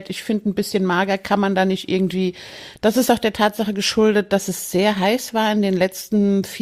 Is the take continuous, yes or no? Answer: no